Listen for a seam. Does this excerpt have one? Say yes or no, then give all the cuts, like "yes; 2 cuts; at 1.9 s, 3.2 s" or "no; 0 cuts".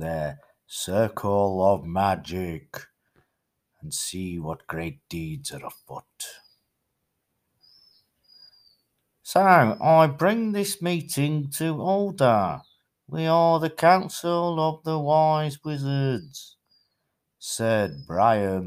no; 0 cuts